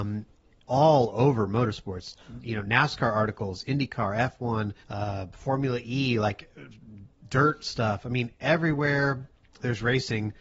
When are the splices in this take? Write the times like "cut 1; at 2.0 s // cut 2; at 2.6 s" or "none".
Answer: cut 1; at 4.8 s